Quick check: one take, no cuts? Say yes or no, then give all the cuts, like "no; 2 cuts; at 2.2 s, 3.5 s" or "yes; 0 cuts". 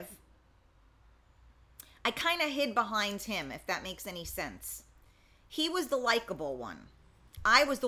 yes; 0 cuts